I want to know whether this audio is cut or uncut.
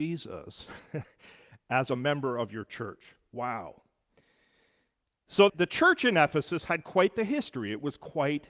cut